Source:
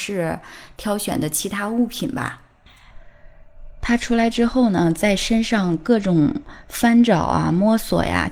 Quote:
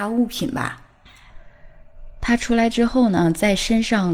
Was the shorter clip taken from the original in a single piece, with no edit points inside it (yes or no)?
yes